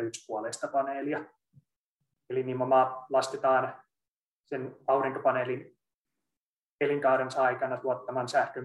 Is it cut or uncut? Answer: cut